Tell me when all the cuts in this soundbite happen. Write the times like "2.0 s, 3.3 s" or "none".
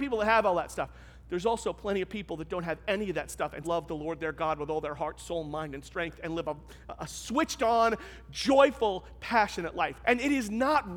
3.6 s, 10.0 s